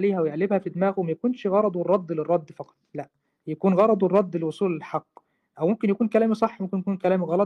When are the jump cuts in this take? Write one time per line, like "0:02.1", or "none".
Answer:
0:02.8